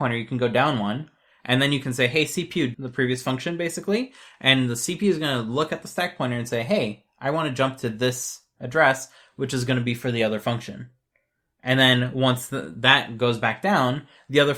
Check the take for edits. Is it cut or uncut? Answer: cut